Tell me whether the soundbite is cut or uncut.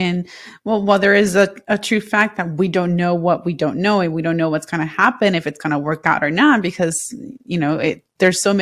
uncut